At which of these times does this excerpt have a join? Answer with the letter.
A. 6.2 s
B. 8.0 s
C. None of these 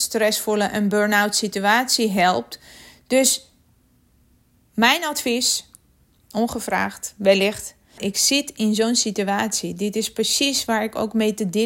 B